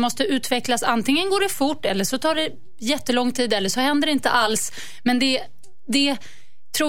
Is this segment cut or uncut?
uncut